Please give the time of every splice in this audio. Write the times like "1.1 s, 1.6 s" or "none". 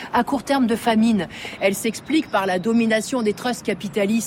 1.6 s